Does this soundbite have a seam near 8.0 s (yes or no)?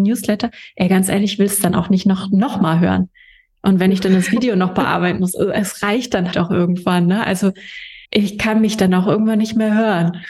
yes